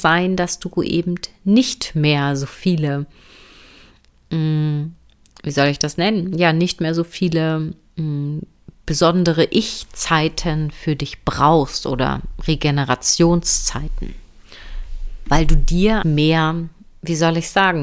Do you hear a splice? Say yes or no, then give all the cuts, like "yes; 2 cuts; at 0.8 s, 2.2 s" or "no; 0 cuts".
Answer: yes; 1 cut; at 16.0 s